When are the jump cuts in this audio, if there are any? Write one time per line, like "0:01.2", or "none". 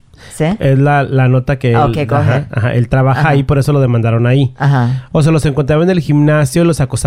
0:05.1